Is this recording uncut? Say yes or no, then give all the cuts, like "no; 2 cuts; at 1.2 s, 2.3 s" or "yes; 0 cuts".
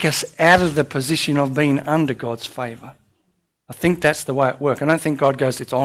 yes; 0 cuts